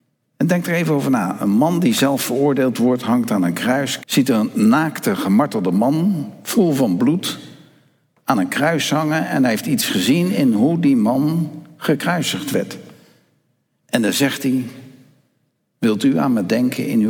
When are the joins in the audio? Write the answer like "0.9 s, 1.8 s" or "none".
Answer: 4.0 s